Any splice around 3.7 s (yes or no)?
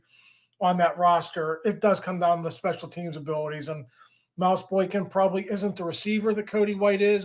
no